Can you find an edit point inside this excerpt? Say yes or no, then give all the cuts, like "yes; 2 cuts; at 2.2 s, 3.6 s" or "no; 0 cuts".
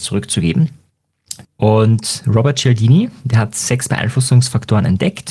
yes; 1 cut; at 1.4 s